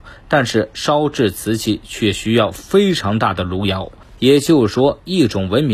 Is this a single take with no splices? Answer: no; 1 cut; at 4.2 s

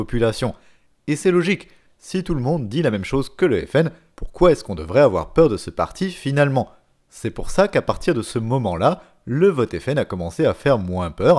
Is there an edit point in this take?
no; 0 cuts

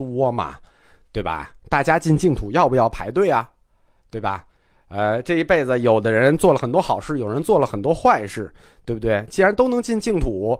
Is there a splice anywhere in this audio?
no; 0 cuts

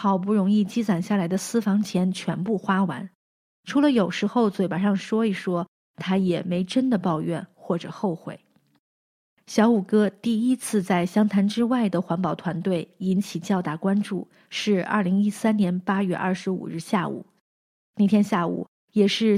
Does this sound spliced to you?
no; 0 cuts

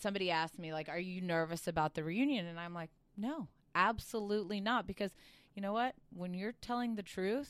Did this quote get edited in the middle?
no; 0 cuts

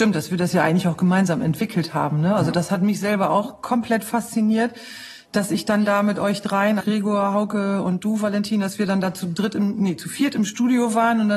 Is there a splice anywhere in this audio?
yes; 1 cut; at 6.8 s

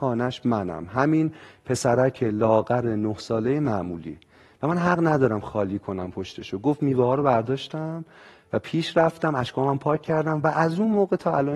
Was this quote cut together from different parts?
no; 0 cuts

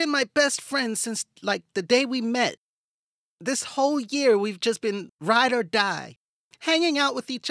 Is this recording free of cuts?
yes; 0 cuts

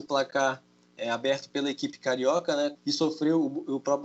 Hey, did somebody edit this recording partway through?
yes; 1 cut; at 2.8 s

